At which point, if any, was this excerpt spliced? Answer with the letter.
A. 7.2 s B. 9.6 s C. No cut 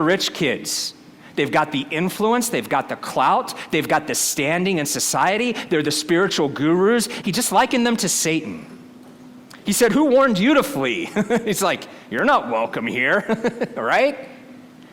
A